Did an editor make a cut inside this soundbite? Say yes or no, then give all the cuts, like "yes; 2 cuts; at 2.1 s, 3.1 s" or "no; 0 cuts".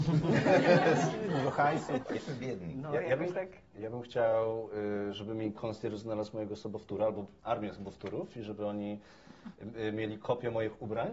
yes; 2 cuts; at 2.0 s, 3.7 s